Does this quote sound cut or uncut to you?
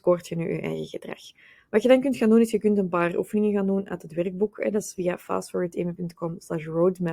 uncut